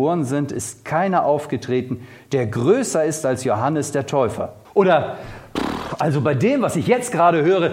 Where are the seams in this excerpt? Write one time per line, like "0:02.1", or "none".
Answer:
0:04.7